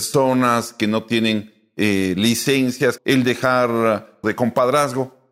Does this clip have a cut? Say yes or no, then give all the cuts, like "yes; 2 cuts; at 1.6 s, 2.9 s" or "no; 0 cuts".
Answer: yes; 2 cuts; at 3.0 s, 4.2 s